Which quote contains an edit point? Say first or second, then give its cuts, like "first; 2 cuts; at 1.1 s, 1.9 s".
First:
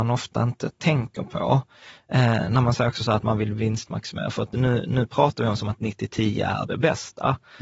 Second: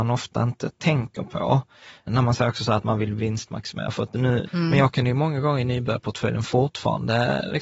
second; 2 cuts; at 2.1 s, 4.5 s